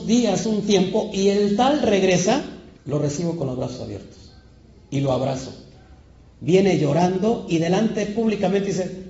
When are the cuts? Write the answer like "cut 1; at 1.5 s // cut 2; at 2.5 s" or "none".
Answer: cut 1; at 2.8 s